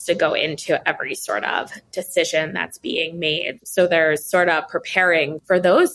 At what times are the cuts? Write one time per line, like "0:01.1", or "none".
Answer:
0:03.6